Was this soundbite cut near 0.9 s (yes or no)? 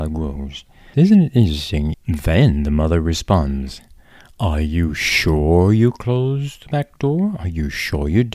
yes